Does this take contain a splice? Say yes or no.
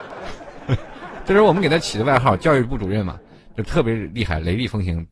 no